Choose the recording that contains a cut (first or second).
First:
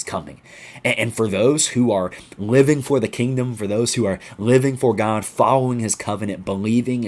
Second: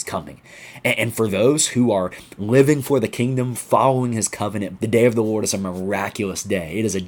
second